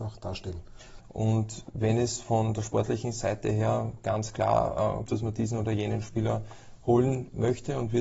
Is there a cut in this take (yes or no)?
yes